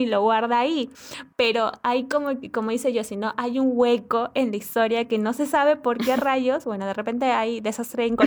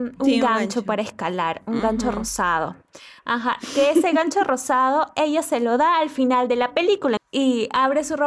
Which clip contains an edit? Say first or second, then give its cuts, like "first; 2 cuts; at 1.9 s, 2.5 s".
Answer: second; 1 cut; at 7.2 s